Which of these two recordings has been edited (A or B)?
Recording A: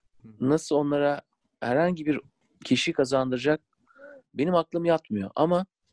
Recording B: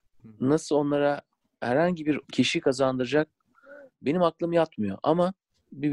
B